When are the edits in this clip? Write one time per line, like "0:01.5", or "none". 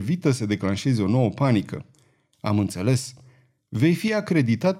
none